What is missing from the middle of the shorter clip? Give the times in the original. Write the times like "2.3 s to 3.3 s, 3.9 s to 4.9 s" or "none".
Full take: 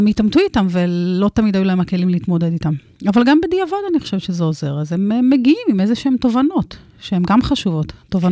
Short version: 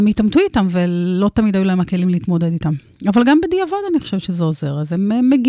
none